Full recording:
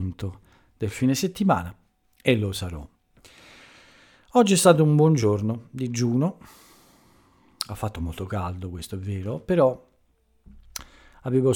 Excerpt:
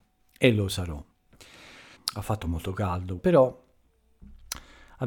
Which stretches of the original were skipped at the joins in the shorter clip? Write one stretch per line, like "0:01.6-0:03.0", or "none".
0:03.8-0:07.5
0:08.7-0:09.4